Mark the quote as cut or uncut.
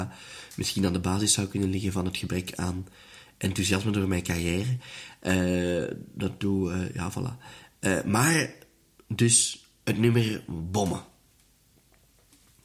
uncut